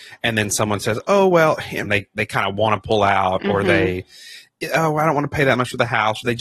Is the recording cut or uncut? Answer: cut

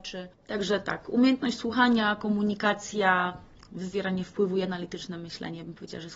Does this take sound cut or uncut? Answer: uncut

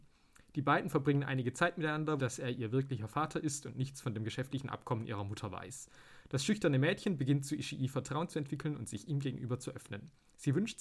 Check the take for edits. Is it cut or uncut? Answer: cut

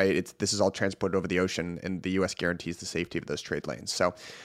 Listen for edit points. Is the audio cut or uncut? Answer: uncut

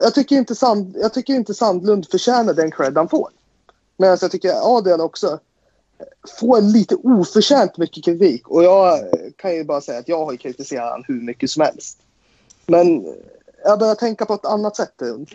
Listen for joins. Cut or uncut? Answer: uncut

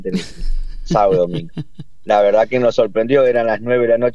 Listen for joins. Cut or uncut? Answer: uncut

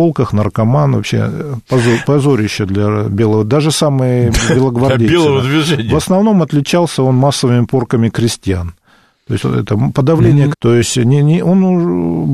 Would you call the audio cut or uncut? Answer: cut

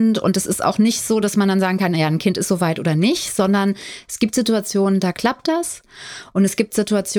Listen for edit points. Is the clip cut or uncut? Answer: uncut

